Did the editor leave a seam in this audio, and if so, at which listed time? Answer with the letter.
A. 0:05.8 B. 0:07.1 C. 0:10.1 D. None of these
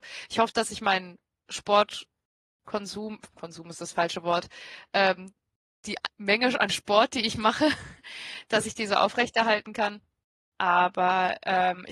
D